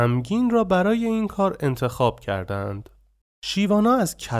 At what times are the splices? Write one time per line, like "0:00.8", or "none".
none